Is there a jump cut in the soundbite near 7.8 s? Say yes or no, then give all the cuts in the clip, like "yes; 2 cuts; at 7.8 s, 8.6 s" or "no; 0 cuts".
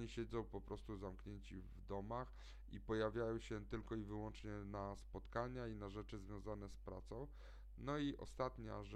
yes; 1 cut; at 7.8 s